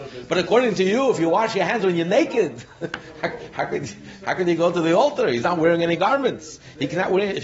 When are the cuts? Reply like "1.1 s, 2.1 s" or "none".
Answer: none